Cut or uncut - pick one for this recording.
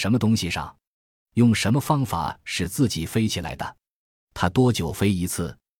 uncut